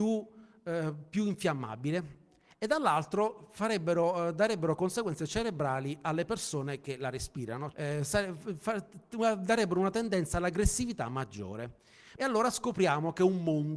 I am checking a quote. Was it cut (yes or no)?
yes